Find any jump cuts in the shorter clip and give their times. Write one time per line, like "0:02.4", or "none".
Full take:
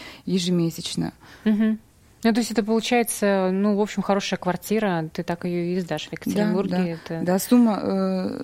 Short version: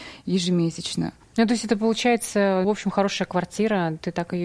0:01.2
0:02.6